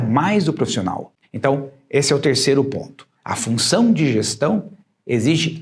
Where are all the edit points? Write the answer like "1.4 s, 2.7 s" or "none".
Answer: 1.2 s, 3.2 s